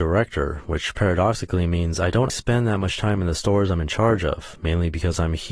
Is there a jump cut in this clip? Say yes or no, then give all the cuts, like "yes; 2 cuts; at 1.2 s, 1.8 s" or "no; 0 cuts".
yes; 1 cut; at 2.3 s